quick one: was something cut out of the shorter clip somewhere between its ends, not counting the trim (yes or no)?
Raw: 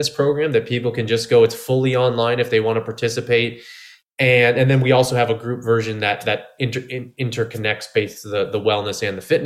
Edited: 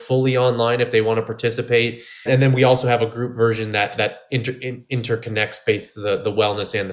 yes